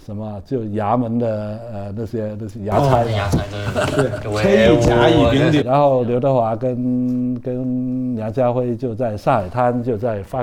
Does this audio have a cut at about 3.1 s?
no; 1 cut; at 5.6 s

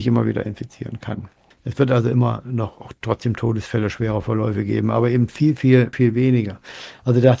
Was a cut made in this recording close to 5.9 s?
yes; 2 cuts; at 1.5 s, 5.9 s

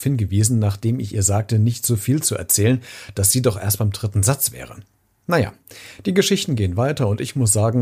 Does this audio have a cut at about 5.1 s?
no; 0 cuts

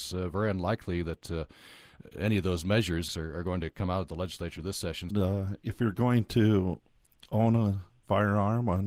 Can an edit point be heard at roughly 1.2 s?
no; 2 cuts; at 3.1 s, 5.1 s

